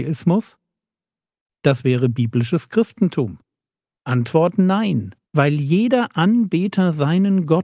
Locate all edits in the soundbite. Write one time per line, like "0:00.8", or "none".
0:01.5
0:03.9
0:05.2